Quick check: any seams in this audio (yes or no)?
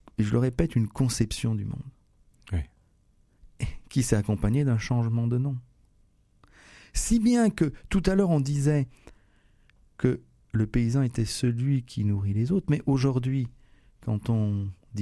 no